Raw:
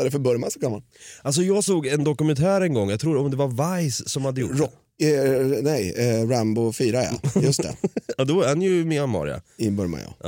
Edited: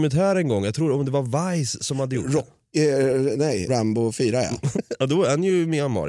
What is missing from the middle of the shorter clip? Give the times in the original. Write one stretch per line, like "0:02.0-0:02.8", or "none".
0:05.9-0:06.3
0:07.3-0:07.9